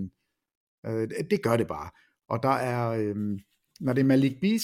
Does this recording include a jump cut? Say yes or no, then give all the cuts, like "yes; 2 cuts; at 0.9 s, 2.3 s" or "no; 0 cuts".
no; 0 cuts